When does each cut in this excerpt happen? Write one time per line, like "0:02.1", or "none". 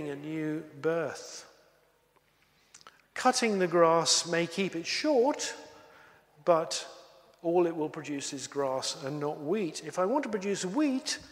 0:03.0